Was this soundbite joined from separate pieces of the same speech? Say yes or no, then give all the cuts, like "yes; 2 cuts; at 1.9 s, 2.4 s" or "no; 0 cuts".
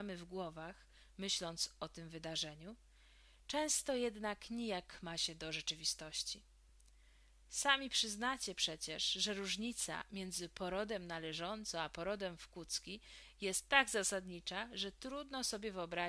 no; 0 cuts